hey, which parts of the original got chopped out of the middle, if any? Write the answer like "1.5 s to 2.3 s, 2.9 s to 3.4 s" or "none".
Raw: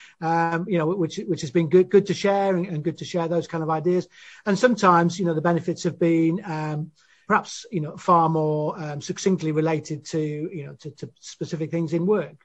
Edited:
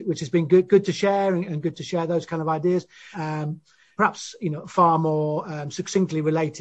4.3 s to 6.4 s